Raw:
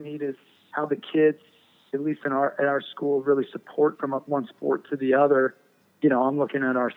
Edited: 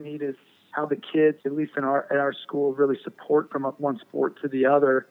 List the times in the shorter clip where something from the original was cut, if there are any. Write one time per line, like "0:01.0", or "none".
0:01.4